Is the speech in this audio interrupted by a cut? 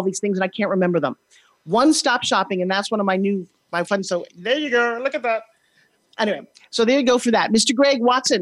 no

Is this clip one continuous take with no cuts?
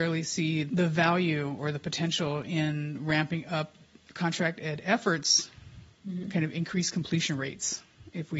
no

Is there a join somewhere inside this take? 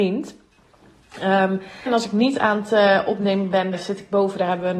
yes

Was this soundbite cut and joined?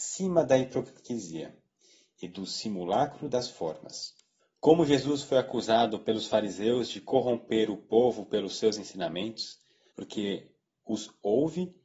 yes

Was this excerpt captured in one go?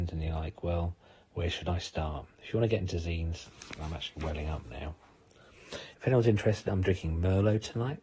no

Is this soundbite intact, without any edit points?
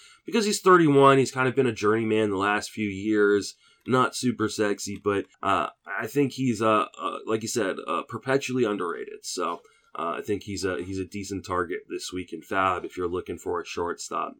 no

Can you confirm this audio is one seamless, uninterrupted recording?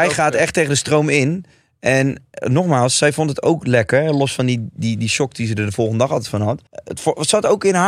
no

